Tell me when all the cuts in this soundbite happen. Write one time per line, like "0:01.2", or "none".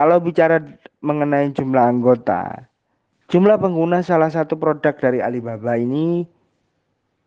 0:03.1